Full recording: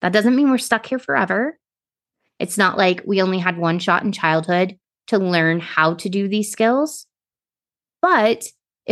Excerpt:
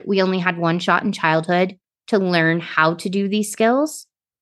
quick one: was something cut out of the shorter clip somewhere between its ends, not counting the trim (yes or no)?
no